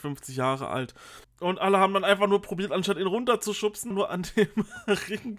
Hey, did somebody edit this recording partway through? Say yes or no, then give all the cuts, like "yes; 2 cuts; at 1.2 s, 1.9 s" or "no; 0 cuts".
yes; 2 cuts; at 1.2 s, 3.9 s